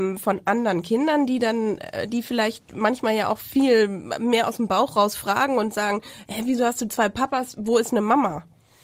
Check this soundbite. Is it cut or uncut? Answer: uncut